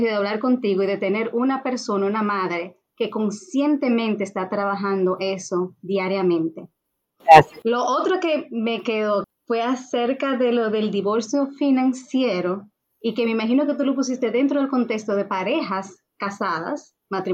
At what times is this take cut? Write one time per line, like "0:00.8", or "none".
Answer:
0:07.0
0:09.2